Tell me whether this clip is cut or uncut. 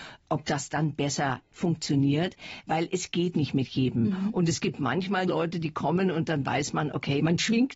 cut